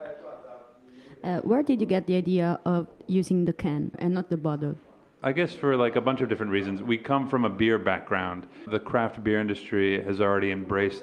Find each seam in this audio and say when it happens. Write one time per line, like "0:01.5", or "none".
none